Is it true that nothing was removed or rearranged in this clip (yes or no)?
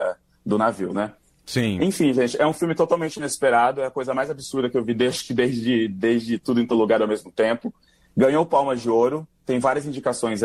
yes